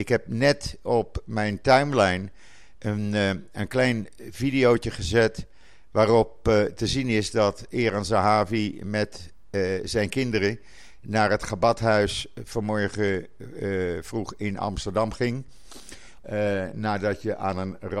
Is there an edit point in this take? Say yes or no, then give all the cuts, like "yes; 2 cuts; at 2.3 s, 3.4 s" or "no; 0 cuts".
yes; 1 cut; at 16.2 s